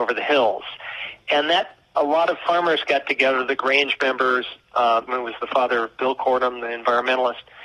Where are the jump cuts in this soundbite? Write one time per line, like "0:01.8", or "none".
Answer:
0:05.1